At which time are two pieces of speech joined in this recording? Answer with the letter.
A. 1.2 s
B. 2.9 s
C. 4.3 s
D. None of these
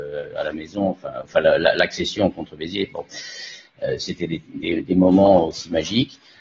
D